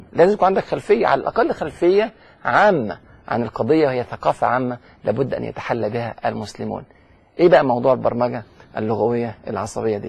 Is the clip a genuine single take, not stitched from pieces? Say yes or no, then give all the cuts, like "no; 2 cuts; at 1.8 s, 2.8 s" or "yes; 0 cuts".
yes; 0 cuts